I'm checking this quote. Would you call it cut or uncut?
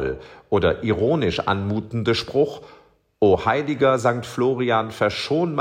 uncut